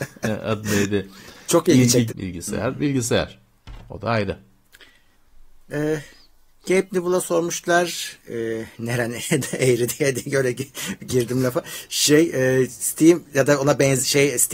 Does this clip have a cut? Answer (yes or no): yes